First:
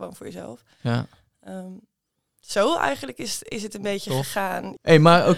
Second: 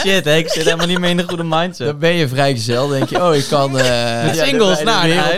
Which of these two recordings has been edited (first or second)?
second